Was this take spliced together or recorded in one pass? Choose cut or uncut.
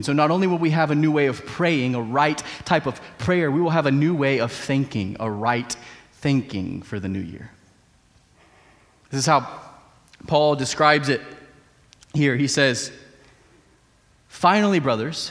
uncut